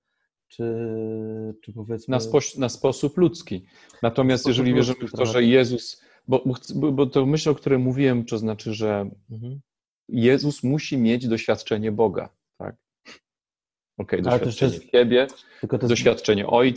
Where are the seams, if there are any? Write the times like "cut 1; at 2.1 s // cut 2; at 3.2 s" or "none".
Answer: none